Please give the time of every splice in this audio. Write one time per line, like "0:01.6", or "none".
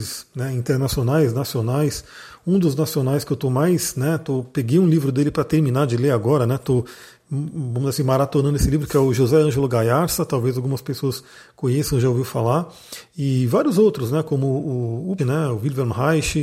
0:15.2